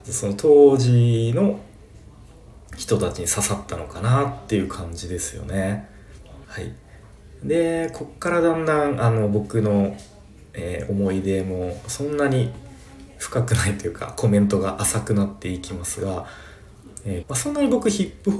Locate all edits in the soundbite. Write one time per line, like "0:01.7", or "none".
0:06.4
0:17.2